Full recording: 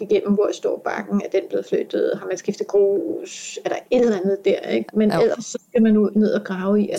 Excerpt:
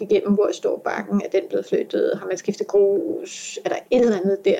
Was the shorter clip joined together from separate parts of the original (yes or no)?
no